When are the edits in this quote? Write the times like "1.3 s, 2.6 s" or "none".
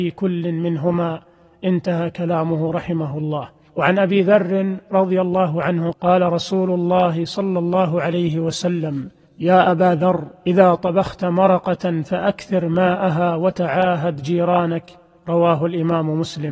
5.9 s